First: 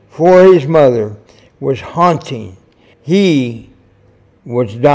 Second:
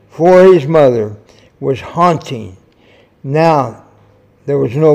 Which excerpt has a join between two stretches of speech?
first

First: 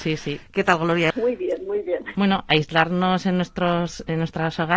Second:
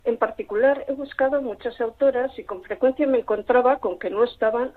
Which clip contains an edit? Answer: first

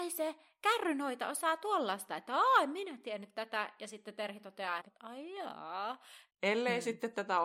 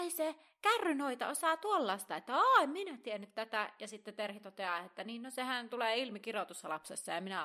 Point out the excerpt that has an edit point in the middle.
first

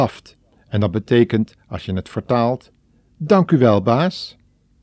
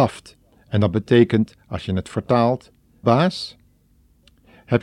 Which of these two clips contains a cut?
second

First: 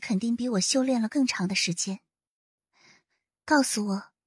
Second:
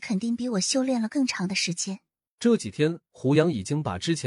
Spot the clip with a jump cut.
second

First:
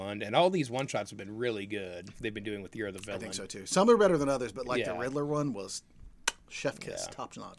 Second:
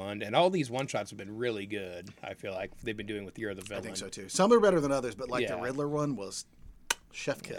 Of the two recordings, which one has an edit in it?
first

